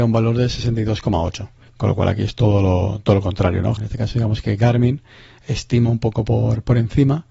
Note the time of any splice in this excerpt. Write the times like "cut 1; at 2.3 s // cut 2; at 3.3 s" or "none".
cut 1; at 1.6 s // cut 2; at 3.8 s